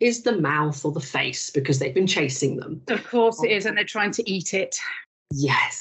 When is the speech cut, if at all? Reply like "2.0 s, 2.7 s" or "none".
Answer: none

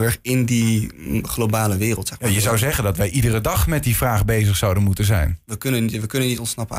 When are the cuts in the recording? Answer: none

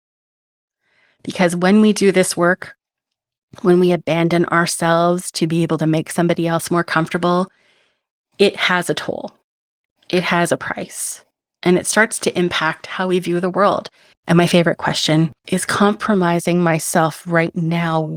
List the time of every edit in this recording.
14.1 s, 15.4 s

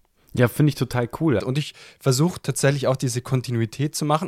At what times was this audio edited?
1.4 s

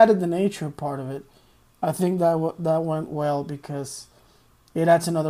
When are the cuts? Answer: none

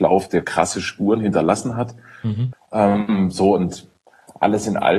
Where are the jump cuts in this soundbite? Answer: 2.5 s

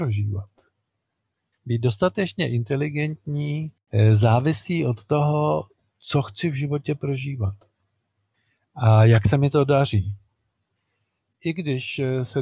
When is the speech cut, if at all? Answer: 1.5 s, 11.4 s

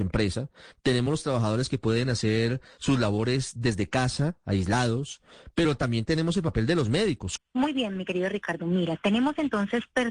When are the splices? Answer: 7.4 s

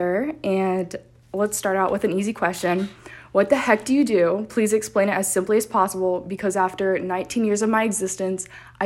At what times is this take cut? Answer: none

